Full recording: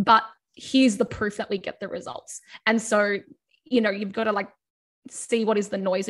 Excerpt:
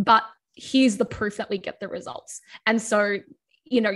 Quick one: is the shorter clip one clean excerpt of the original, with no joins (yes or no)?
yes